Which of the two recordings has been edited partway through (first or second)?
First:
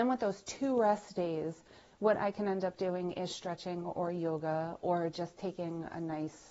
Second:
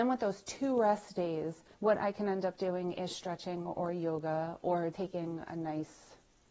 second